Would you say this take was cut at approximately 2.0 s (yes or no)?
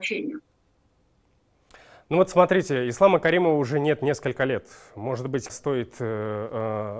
no